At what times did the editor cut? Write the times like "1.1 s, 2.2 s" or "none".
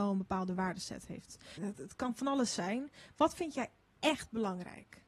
1.6 s